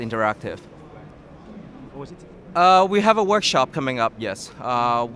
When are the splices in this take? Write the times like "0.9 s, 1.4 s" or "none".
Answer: 1.9 s